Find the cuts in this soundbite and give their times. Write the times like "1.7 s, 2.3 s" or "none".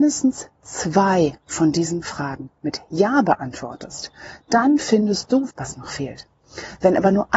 5.5 s